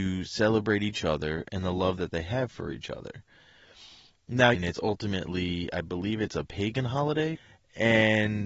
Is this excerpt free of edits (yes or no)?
no